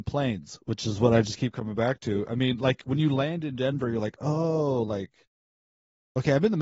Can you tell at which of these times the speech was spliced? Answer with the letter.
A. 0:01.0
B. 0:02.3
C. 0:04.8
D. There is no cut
D